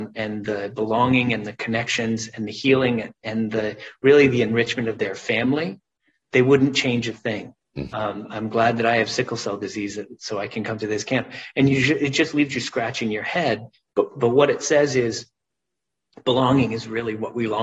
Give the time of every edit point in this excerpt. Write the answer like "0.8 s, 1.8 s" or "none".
7.9 s